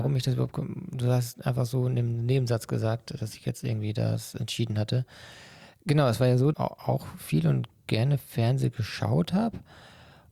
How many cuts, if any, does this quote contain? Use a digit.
1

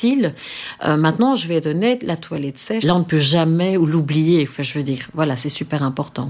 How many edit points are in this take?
1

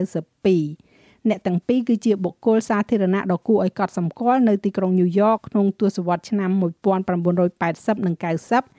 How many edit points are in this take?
1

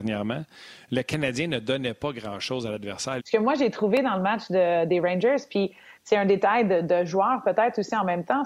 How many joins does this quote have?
1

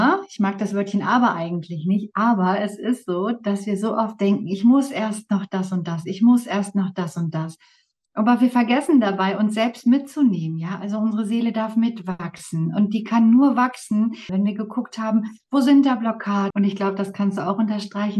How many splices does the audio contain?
2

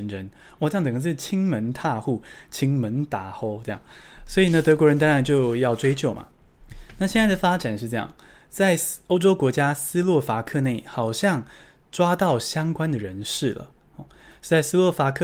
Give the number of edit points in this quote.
0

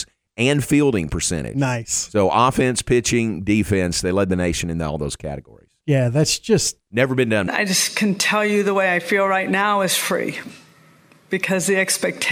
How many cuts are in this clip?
1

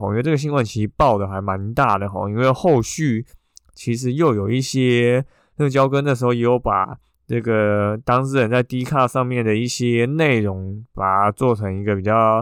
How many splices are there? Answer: 1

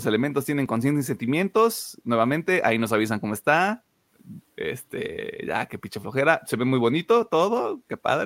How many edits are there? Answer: 1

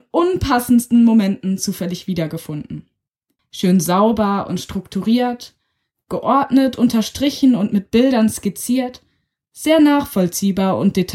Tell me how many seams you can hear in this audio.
1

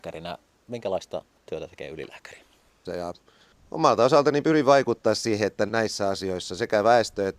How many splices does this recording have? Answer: 2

